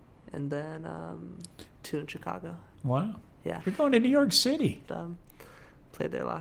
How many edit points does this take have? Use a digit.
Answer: 2